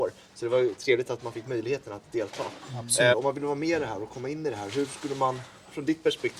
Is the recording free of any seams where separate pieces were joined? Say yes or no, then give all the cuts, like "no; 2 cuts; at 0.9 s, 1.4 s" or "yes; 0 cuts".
no; 1 cut; at 3.1 s